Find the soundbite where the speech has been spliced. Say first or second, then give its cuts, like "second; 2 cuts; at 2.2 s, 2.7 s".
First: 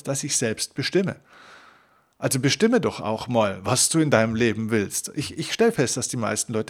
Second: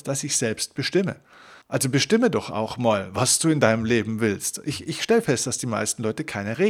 second; 1 cut; at 1.6 s